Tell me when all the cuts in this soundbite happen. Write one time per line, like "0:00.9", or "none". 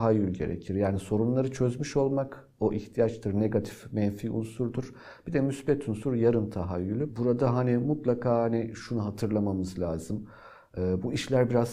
0:07.1